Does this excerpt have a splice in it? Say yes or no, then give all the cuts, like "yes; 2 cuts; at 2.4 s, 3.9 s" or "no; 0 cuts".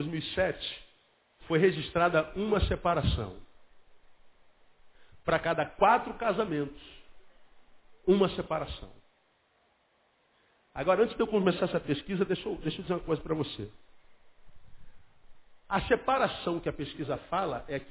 no; 0 cuts